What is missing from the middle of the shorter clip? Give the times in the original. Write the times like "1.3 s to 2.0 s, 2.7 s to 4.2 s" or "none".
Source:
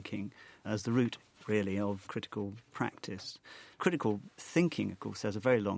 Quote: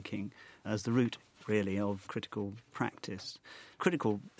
none